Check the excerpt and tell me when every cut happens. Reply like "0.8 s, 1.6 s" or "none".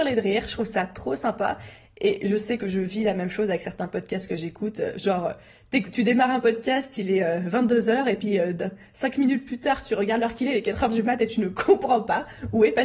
none

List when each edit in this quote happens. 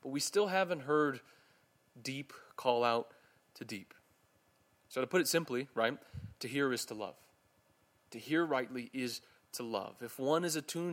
none

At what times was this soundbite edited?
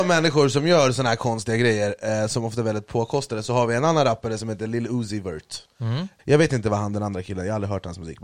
6.2 s

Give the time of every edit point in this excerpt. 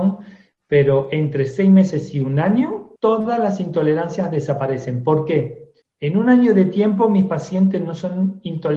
3.0 s, 5.8 s

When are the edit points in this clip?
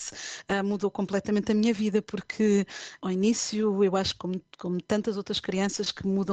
none

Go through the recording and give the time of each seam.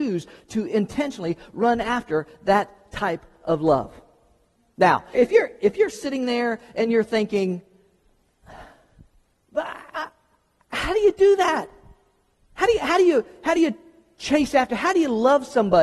5.1 s

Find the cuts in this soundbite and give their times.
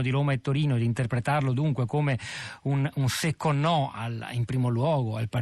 none

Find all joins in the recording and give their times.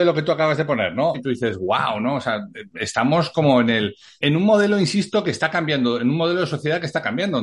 1.1 s, 4.2 s

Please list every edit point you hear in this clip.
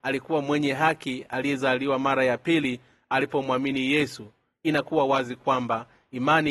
none

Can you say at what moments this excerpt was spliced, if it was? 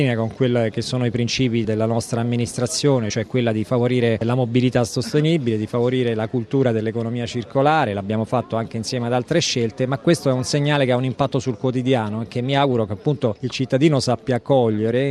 none

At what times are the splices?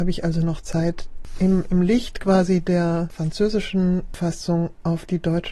none

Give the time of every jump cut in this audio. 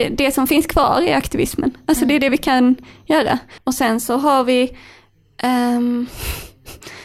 3.6 s

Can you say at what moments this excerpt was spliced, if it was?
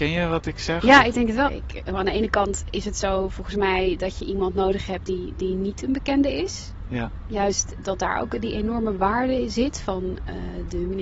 1.5 s

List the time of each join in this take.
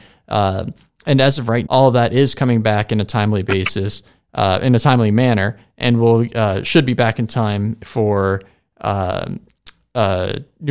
1.7 s

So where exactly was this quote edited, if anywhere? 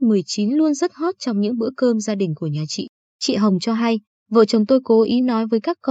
none

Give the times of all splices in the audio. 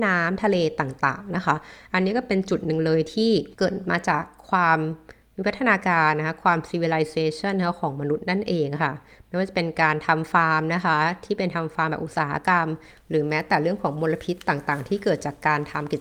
3.5 s

